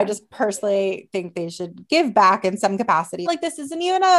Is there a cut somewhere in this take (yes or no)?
yes